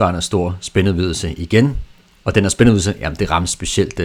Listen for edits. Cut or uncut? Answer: uncut